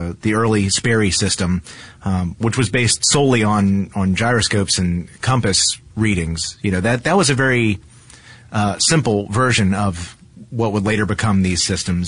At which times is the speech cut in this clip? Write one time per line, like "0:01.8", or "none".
none